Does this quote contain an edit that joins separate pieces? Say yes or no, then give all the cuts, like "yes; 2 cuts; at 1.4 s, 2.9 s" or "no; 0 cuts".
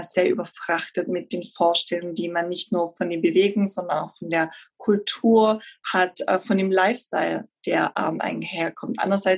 no; 0 cuts